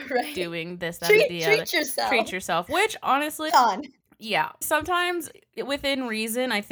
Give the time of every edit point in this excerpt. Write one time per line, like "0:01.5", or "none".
0:03.5
0:04.6